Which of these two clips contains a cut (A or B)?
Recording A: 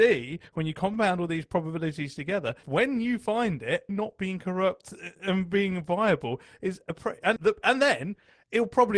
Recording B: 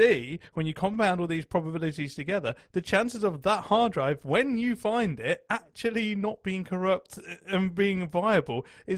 A